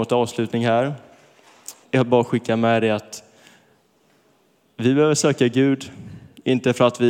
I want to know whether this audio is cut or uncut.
cut